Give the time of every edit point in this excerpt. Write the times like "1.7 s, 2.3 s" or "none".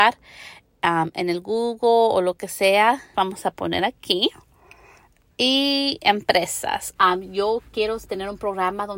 3.1 s, 7.0 s